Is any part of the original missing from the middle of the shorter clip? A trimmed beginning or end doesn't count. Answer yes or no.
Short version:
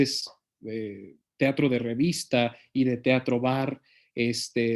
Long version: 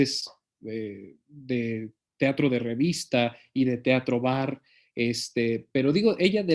yes